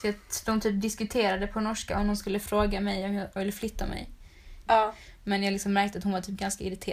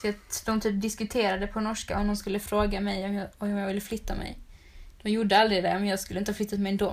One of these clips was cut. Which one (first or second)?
first